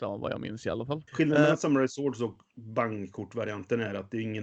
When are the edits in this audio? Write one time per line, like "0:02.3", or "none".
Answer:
0:01.1